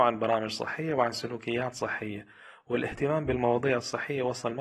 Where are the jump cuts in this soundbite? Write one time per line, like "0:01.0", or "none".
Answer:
none